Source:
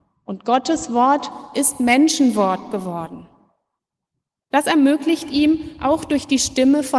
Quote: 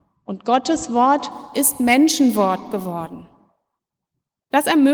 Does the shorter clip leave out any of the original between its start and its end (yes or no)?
no